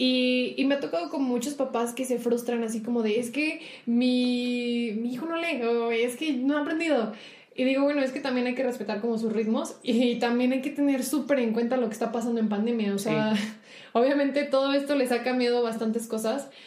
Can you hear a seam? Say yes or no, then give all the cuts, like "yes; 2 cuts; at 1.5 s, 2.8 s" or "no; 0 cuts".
no; 0 cuts